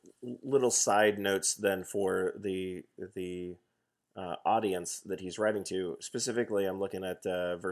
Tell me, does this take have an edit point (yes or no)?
no